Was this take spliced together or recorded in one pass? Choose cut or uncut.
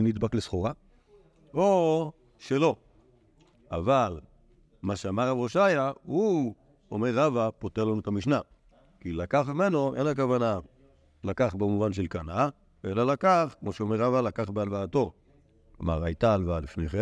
cut